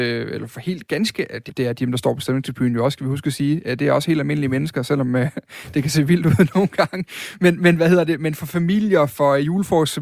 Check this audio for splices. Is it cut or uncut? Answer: cut